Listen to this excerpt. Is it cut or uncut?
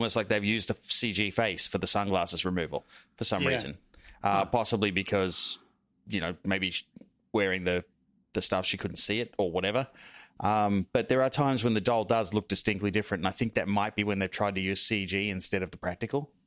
uncut